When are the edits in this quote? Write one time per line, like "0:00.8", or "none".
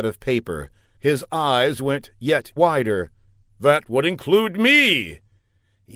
0:02.6